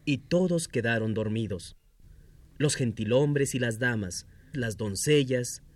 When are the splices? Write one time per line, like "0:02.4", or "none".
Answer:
0:04.5